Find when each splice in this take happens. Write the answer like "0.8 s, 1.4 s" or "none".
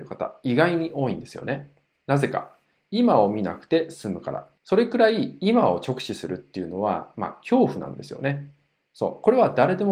1.9 s, 4.6 s